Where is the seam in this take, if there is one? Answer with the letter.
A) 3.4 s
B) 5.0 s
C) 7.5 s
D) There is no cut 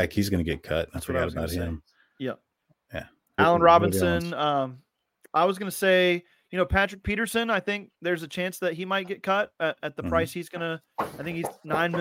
A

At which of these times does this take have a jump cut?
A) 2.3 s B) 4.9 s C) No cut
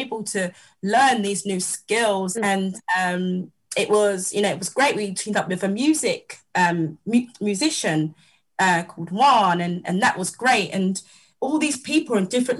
A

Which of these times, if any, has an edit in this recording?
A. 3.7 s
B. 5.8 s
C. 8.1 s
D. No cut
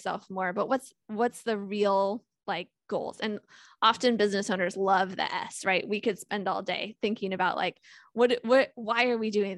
D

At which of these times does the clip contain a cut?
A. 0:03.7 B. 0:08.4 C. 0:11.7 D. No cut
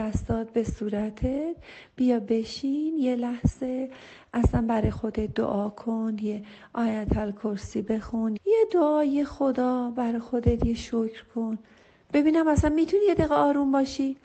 B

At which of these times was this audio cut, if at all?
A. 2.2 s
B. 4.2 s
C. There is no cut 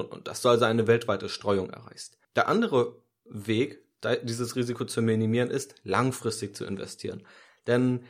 A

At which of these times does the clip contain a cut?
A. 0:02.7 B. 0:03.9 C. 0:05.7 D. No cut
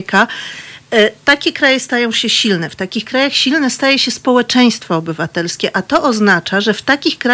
D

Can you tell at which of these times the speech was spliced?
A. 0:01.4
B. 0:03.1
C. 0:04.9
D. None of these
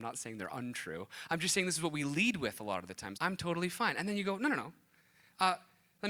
B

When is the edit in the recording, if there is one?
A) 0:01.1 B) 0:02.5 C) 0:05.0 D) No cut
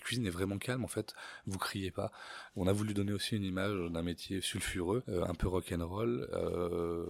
D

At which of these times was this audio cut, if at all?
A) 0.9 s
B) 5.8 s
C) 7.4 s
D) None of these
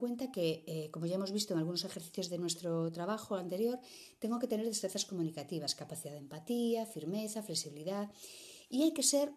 D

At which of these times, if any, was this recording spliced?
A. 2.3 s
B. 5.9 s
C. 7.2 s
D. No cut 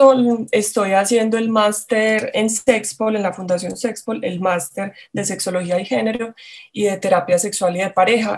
A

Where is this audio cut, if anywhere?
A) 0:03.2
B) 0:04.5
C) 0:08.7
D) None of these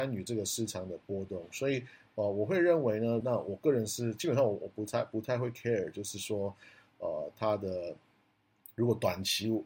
A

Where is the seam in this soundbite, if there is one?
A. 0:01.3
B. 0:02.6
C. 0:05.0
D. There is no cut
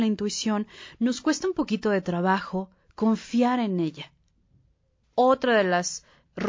C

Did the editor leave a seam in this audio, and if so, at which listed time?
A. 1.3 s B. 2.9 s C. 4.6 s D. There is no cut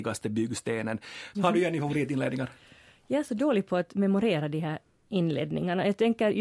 A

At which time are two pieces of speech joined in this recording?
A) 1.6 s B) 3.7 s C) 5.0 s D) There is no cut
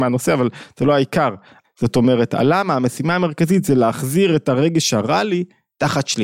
A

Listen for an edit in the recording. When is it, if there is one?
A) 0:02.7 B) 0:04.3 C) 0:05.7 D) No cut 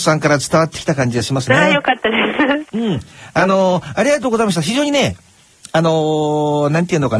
A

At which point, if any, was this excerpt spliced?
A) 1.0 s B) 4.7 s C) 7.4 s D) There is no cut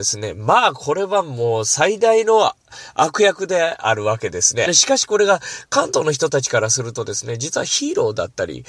B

